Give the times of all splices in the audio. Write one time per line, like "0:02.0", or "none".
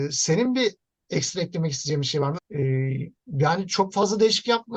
0:02.4